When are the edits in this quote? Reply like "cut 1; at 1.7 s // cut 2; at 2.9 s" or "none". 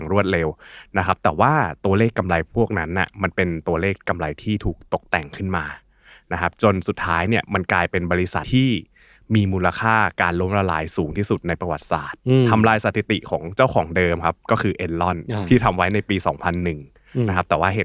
cut 1; at 8.4 s